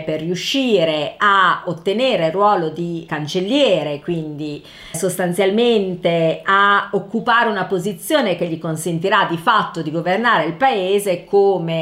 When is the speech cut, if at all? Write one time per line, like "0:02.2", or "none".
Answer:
0:03.1
0:04.9